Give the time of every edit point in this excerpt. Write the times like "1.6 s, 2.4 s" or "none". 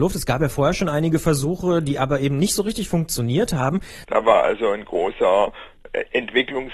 4.0 s